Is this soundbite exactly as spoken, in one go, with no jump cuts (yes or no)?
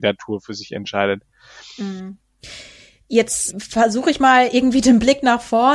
yes